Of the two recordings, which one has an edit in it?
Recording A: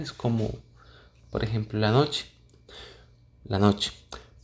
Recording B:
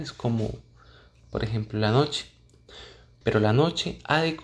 B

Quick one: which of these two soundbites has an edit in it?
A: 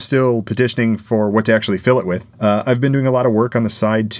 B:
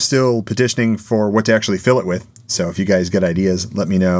A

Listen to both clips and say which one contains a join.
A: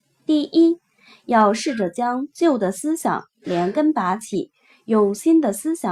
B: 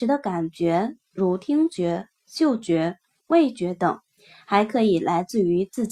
B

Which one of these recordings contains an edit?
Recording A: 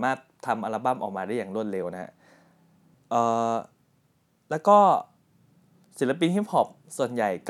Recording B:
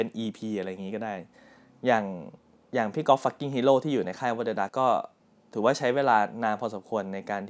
B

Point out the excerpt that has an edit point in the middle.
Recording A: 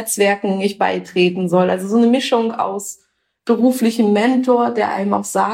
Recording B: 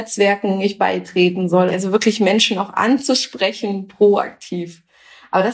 B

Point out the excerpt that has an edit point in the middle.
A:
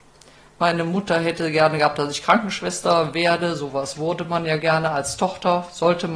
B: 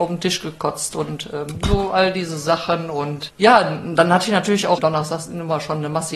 B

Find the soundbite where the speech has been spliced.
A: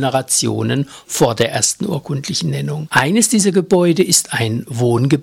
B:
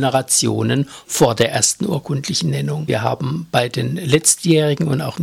B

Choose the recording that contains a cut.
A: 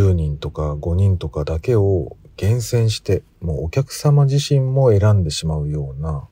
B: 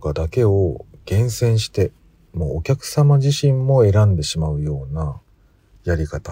A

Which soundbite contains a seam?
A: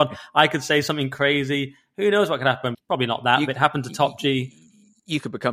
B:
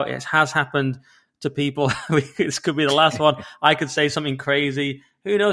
A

